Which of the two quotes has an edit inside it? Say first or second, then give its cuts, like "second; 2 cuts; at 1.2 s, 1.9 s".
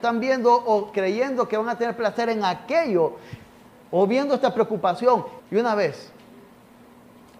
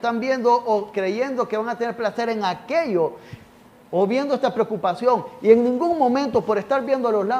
first; 1 cut; at 5.4 s